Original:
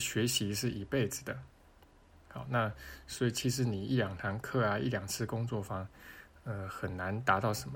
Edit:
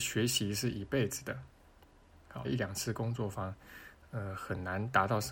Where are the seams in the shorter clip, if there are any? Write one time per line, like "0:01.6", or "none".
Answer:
0:02.4